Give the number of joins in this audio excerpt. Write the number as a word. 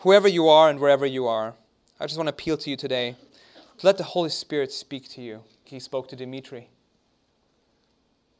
one